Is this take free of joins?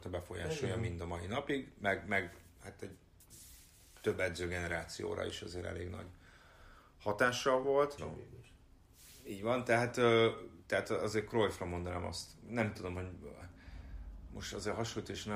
no; 1 cut; at 8.0 s

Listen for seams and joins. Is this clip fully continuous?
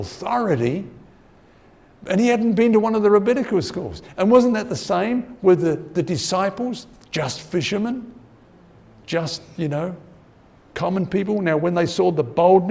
yes; 0 cuts

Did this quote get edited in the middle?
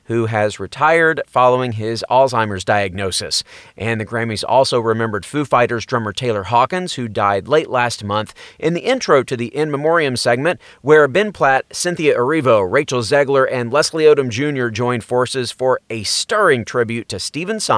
no; 0 cuts

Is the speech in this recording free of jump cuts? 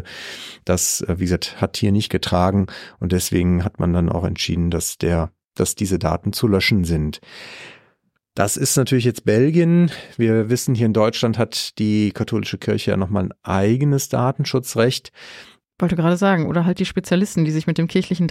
no; 1 cut; at 15.6 s

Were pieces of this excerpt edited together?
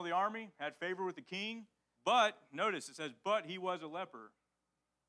yes; 1 cut; at 1.9 s

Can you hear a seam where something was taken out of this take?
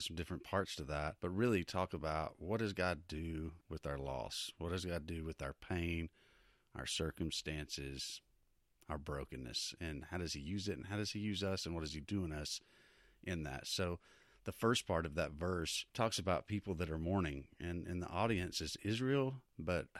no; 0 cuts

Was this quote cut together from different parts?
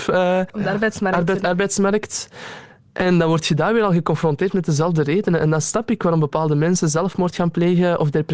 no; 0 cuts

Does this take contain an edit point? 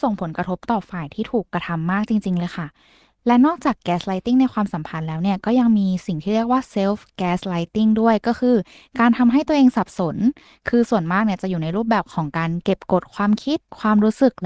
no; 0 cuts

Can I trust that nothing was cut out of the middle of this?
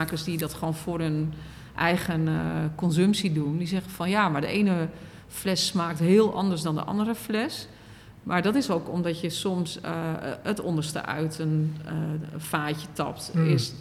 yes; 0 cuts

